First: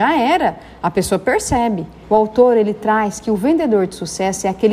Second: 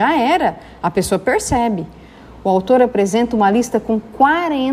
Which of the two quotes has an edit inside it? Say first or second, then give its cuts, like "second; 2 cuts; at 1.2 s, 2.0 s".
first; 1 cut; at 2.0 s